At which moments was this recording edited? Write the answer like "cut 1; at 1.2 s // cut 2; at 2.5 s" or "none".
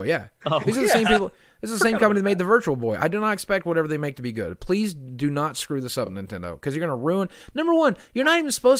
none